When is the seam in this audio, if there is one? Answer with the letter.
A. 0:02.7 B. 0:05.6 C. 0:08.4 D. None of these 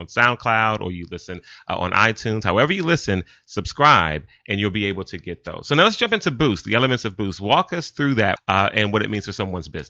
C